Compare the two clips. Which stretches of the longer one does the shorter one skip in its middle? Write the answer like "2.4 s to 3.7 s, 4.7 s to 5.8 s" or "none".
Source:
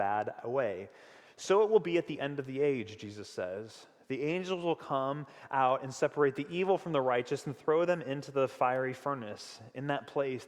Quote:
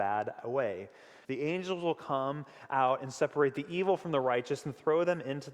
1.2 s to 4.1 s